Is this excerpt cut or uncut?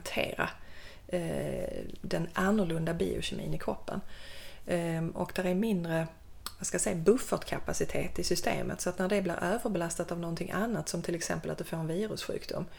uncut